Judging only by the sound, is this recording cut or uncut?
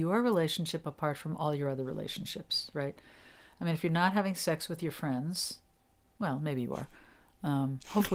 uncut